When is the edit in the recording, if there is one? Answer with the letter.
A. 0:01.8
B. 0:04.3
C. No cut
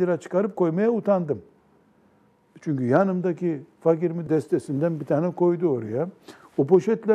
B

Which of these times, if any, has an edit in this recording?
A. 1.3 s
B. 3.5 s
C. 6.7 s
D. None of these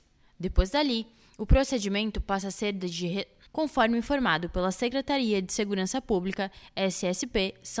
B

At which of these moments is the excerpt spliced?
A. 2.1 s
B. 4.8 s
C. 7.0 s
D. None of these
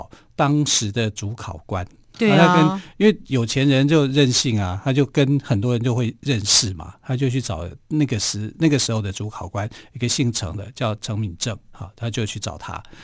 A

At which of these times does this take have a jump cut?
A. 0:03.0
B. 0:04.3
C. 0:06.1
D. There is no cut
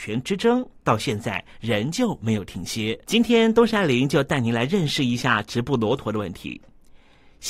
A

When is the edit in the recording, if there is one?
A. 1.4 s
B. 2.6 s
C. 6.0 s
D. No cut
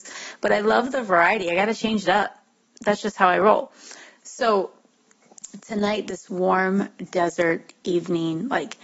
D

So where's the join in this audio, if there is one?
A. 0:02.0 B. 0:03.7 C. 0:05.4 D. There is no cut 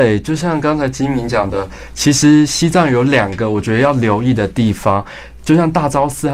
D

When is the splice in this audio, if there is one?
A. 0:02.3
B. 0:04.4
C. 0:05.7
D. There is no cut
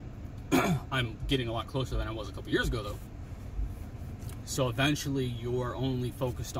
B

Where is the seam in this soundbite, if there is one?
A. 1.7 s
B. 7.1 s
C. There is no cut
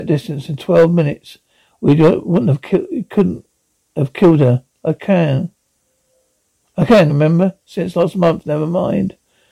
B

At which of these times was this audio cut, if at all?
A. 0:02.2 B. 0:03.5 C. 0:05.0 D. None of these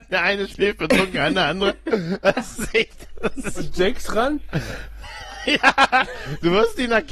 C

